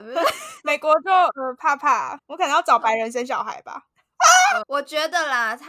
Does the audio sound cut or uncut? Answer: cut